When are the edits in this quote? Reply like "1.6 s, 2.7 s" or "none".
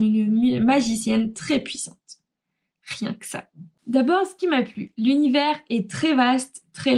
3.8 s

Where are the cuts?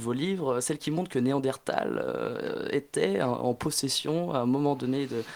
none

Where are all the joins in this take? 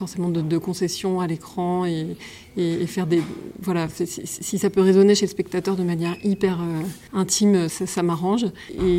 7.7 s

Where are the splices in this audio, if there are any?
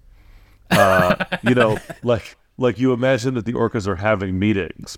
none

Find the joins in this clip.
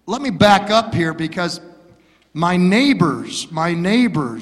none

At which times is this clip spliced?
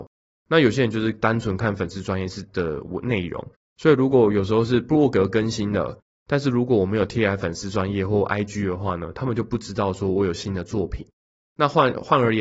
none

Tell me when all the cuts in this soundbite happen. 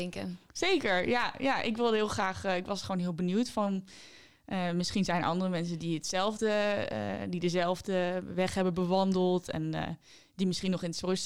none

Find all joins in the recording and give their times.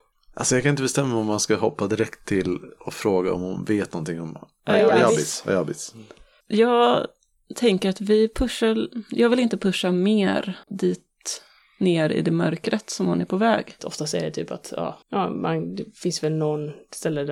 10.6 s, 13.8 s, 15.0 s

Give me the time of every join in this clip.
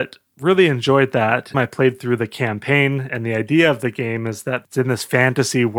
1.5 s, 3.1 s

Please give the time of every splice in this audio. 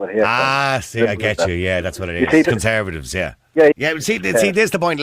2.4 s, 3.7 s

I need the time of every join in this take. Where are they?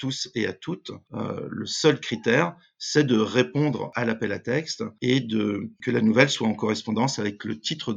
none

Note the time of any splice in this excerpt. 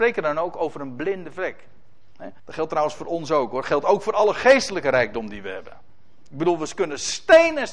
2.4 s

